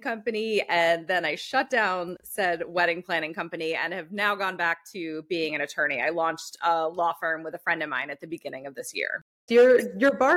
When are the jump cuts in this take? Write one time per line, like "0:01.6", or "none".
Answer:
0:09.5